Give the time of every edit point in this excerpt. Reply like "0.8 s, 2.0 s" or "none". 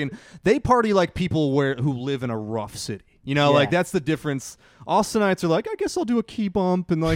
none